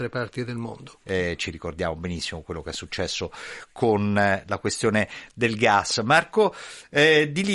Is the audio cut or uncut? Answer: cut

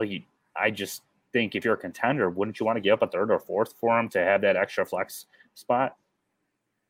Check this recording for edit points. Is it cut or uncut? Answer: uncut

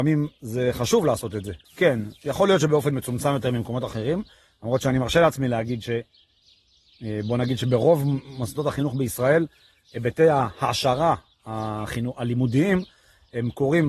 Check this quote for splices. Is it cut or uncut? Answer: cut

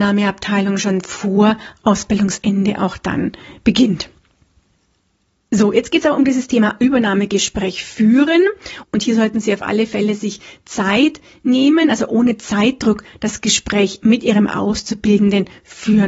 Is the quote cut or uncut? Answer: uncut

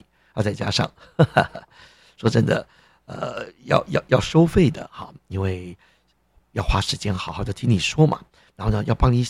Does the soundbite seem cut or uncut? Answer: uncut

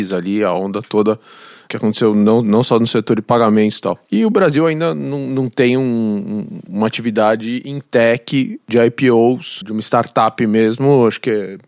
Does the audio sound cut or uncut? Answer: cut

